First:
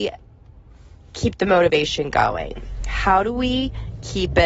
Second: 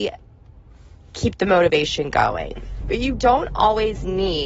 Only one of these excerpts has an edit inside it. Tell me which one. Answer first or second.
second